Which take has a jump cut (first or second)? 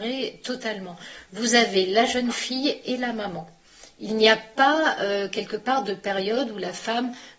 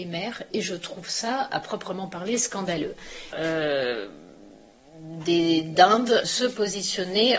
second